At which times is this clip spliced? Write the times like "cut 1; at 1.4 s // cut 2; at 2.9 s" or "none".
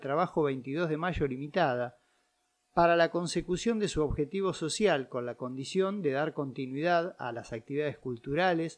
none

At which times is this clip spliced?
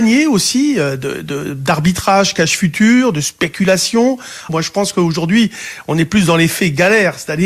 cut 1; at 4.5 s

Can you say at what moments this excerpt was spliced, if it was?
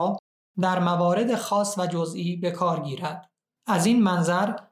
cut 1; at 3.6 s

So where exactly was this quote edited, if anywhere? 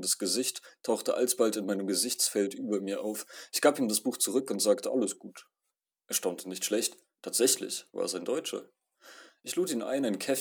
none

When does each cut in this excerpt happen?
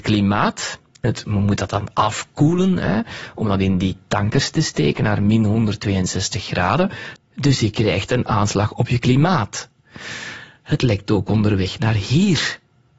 cut 1; at 1.0 s // cut 2; at 7.2 s

